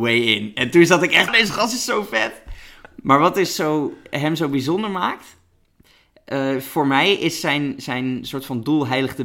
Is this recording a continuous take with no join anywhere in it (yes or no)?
no